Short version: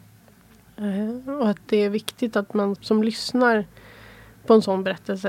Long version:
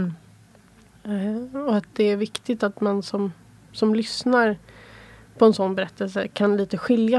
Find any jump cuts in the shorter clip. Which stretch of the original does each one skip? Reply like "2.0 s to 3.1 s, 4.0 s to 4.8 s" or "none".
3.0 s to 3.7 s